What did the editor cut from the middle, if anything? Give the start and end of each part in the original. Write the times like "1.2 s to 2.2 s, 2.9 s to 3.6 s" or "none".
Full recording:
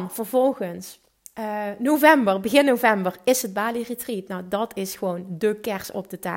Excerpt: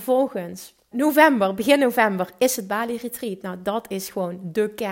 1.2 s to 1.8 s